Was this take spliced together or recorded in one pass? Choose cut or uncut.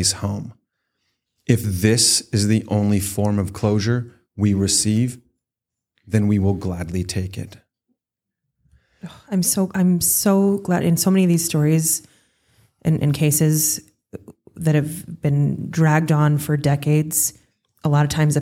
uncut